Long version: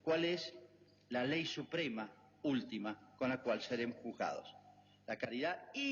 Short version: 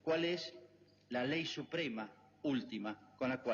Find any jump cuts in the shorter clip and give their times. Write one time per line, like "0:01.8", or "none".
none

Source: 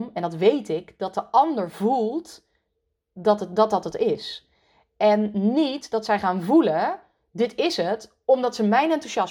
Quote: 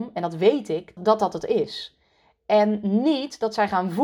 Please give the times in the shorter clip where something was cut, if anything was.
0:01.0

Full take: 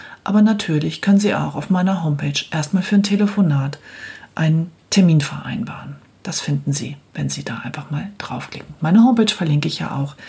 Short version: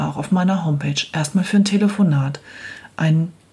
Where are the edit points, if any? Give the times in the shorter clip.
none

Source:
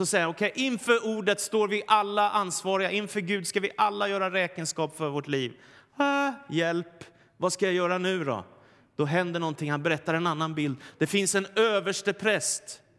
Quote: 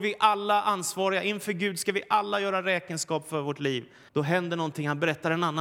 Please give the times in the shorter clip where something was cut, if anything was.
0:04.1

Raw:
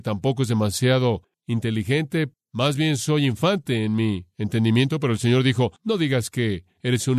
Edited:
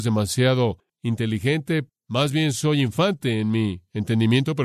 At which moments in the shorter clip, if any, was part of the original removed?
none

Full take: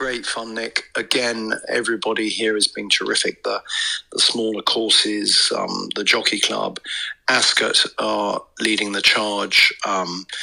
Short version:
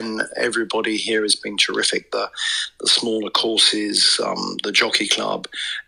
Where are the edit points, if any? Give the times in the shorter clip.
none

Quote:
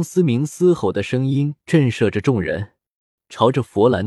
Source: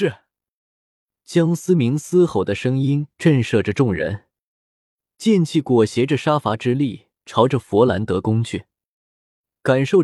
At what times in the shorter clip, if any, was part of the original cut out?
0:03.2

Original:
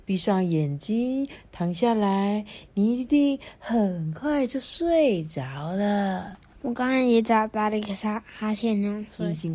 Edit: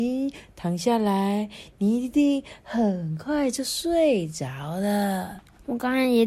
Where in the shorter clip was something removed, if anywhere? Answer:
none

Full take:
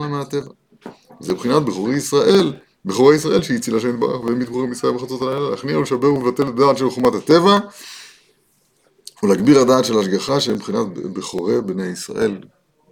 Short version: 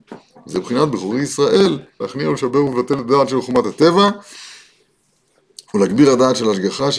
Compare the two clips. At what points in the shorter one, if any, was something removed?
0:02.0

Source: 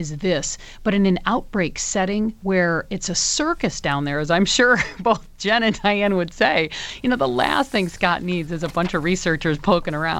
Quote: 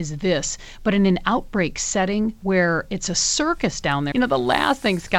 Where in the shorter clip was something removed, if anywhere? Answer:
0:04.1

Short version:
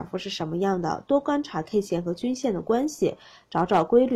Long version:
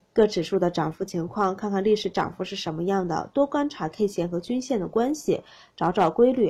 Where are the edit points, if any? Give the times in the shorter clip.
none

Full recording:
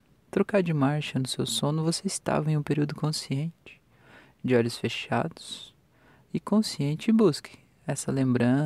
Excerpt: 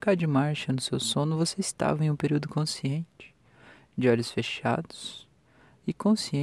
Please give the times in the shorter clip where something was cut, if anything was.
none

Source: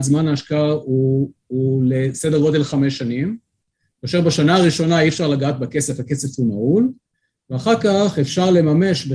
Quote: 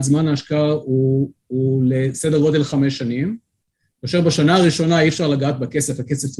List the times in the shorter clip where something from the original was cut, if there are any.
none

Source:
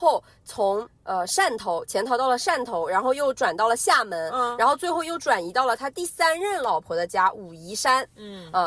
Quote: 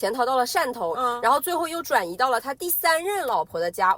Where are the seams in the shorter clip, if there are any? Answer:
0:00.9

